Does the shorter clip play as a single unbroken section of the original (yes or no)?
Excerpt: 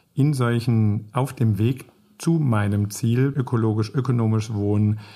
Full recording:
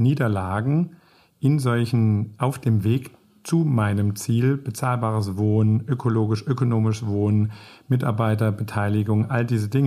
no